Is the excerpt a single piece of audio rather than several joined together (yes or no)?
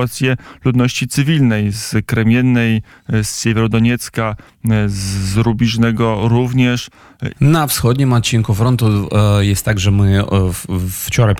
no